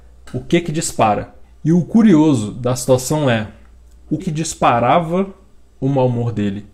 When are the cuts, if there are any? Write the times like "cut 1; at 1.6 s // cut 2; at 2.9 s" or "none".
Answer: cut 1; at 1.4 s // cut 2; at 4.2 s